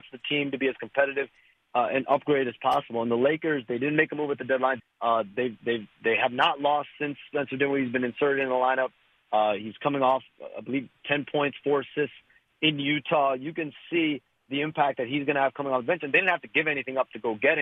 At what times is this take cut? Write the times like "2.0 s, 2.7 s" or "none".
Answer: 4.8 s